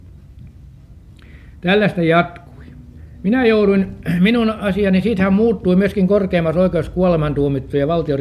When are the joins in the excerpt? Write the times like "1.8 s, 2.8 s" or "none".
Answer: none